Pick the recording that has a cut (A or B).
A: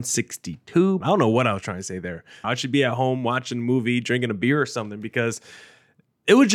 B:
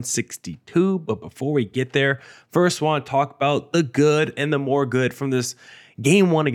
A